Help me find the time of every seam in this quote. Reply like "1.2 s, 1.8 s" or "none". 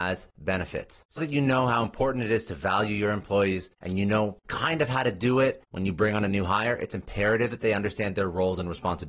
1.2 s, 5.7 s